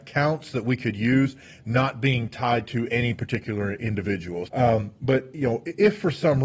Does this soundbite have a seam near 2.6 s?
no; 1 cut; at 4.5 s

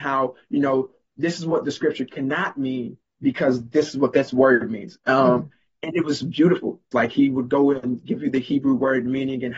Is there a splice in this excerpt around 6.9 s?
yes; 1 cut; at 6.9 s

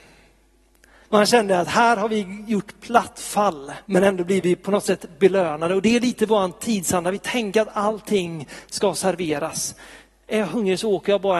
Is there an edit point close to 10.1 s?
no; 2 cuts; at 1.0 s, 3.8 s

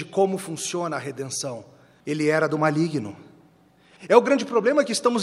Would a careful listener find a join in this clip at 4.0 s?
yes; 2 cuts; at 2.0 s, 4.0 s

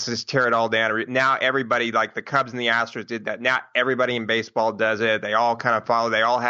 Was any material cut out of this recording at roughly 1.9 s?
no; 0 cuts

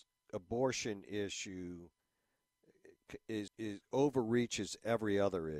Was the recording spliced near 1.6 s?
no; 1 cut; at 3.5 s

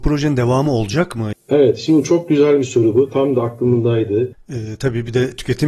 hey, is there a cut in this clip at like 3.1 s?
no; 2 cuts; at 1.3 s, 4.3 s

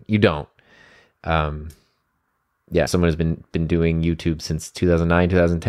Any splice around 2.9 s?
yes; 1 cut; at 2.9 s

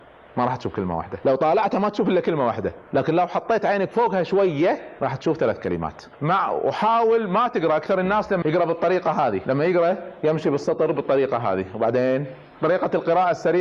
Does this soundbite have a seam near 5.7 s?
no; 1 cut; at 8.4 s

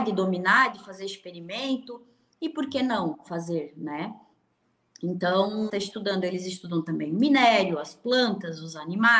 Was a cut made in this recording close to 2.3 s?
no; 1 cut; at 5.7 s

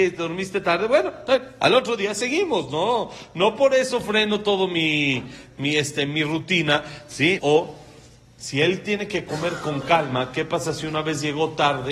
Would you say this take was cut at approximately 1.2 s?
no; 1 cut; at 7.4 s

